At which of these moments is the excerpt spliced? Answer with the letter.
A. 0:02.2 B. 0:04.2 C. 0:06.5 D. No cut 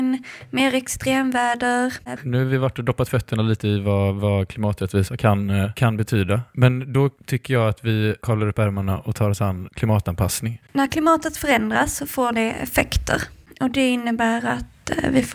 A